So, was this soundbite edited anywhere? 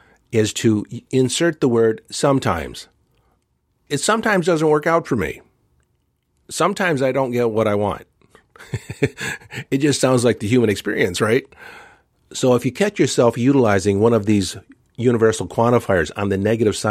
no; 0 cuts

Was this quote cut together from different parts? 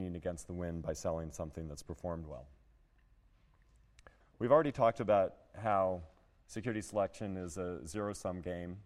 yes; 1 cut; at 4.2 s

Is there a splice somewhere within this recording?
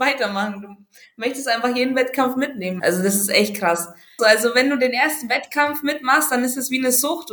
yes; 2 cuts; at 2.8 s, 4.2 s

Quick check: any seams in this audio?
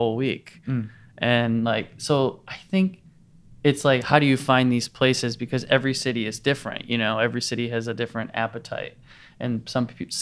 no; 0 cuts

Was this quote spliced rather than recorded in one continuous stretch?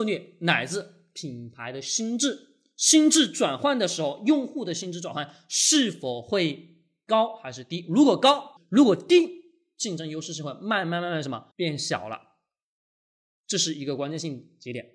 yes; 2 cuts; at 8.6 s, 11.5 s

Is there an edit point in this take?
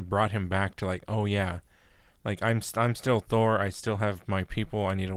no; 0 cuts

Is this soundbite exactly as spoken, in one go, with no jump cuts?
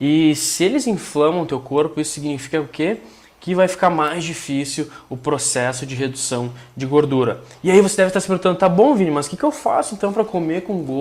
yes; 0 cuts

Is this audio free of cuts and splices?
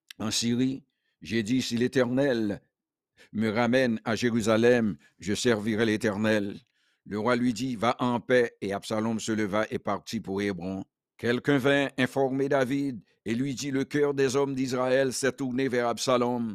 no; 1 cut; at 11.1 s

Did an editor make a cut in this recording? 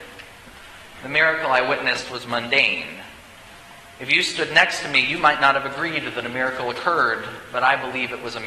no; 0 cuts

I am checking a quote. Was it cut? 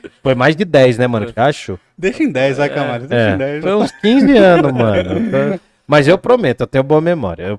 yes; 1 cut; at 1.4 s

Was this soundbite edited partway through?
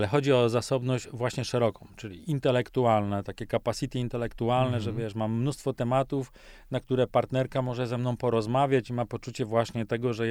no; 0 cuts

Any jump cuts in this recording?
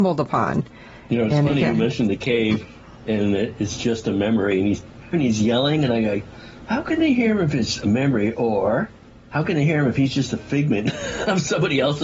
yes; 1 cut; at 5.1 s

